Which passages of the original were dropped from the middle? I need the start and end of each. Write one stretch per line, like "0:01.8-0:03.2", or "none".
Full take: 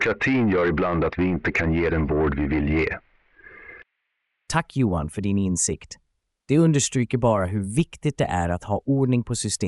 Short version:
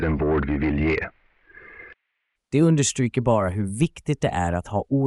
0:04.2-0:06.3